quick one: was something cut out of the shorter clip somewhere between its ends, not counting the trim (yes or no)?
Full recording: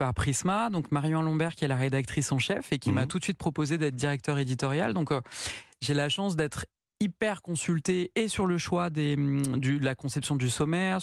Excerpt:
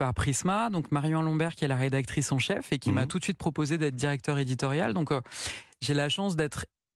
no